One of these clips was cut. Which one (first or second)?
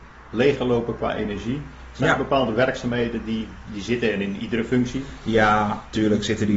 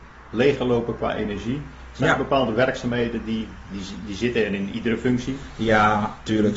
first